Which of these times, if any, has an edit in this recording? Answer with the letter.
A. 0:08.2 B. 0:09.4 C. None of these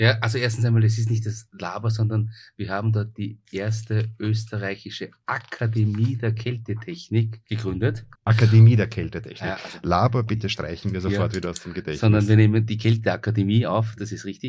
A